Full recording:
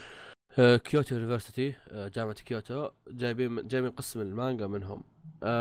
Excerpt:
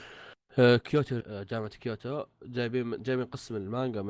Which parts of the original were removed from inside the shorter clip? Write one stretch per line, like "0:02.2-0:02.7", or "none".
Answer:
0:01.2-0:01.9